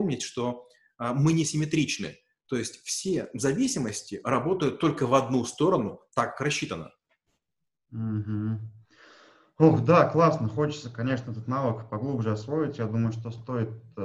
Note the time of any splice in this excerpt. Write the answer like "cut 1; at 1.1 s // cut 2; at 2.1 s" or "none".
none